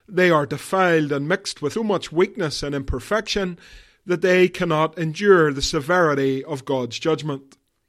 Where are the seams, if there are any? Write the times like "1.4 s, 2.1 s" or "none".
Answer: 1.7 s